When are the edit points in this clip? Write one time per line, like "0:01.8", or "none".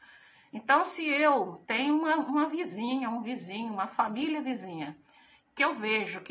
none

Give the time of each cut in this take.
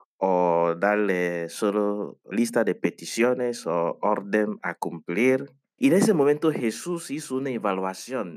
0:02.3
0:05.8

